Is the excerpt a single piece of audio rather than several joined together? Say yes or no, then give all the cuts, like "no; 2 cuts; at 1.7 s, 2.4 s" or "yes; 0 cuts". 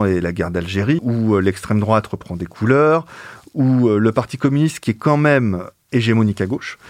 no; 1 cut; at 1.0 s